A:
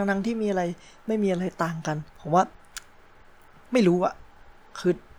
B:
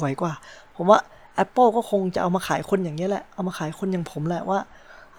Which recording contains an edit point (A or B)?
A